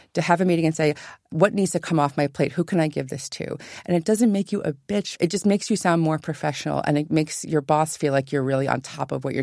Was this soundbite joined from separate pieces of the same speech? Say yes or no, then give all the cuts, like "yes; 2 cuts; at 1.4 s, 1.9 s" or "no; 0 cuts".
no; 0 cuts